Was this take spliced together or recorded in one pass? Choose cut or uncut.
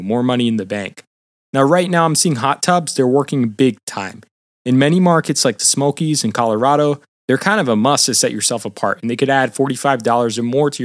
uncut